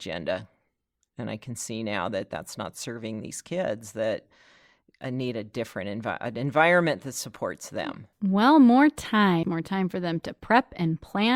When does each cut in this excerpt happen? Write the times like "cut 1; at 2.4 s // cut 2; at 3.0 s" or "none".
cut 1; at 8.1 s // cut 2; at 9.4 s